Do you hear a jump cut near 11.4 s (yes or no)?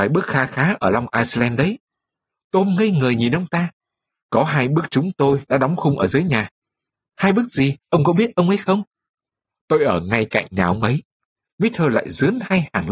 yes